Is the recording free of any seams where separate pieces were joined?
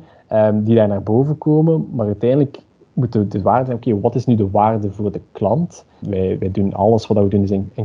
no; 1 cut; at 6.0 s

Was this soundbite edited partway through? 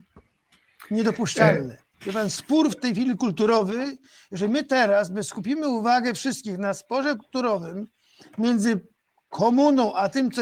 yes; 1 cut; at 1.9 s

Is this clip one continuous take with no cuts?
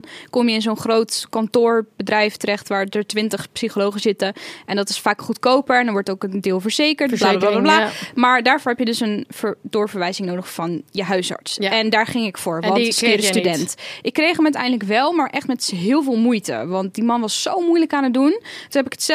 yes; 0 cuts

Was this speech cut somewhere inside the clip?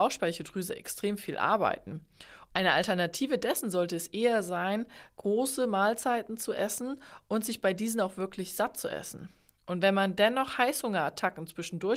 no; 0 cuts

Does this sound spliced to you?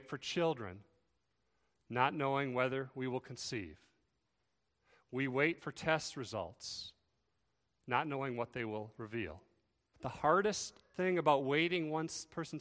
yes; 1 cut; at 9.9 s

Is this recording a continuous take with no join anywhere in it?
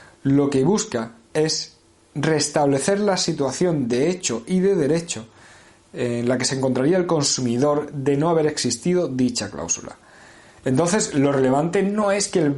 yes; 0 cuts

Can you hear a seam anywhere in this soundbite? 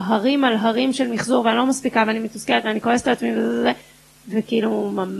no; 0 cuts

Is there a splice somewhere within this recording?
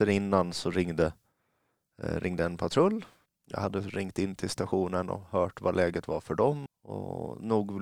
yes; 2 cuts; at 3.3 s, 6.7 s

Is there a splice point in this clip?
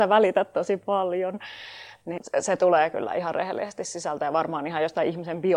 no; 0 cuts

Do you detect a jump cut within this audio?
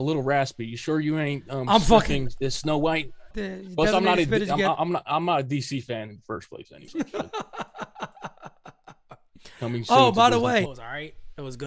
yes; 3 cuts; at 3.3 s, 6.9 s, 10.7 s

